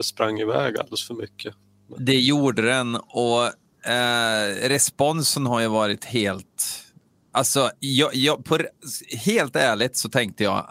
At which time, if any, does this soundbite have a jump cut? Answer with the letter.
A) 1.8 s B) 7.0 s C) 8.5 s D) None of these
D